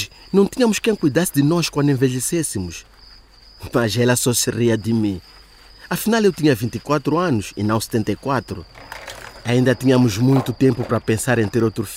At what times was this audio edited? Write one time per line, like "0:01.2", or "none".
none